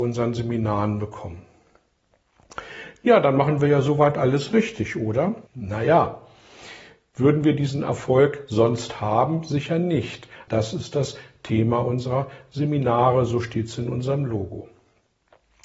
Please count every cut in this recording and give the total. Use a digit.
2